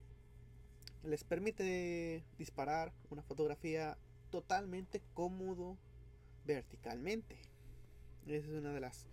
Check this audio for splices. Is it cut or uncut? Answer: cut